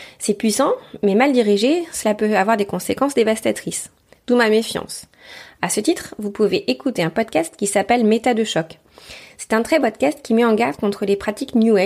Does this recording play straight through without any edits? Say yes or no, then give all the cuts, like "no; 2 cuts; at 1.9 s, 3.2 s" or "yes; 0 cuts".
no; 1 cut; at 9.8 s